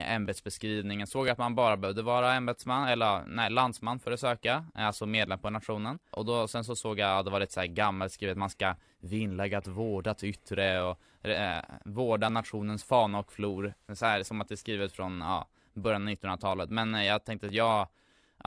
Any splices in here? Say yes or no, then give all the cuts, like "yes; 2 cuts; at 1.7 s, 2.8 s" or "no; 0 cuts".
no; 0 cuts